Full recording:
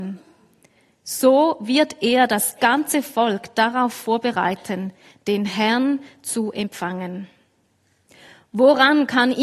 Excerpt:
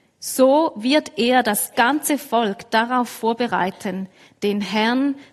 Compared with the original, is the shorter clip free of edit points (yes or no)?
yes